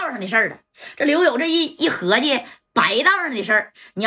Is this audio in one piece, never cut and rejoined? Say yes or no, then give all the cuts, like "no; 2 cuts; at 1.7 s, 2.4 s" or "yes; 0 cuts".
yes; 0 cuts